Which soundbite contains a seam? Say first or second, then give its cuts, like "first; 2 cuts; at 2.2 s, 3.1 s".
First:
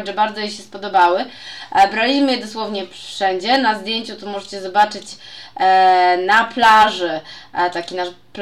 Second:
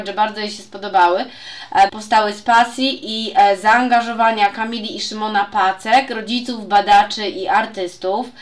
second; 1 cut; at 1.9 s